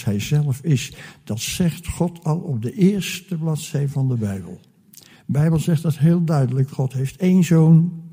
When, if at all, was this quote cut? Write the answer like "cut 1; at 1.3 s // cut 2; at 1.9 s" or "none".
cut 1; at 5.1 s // cut 2; at 6.7 s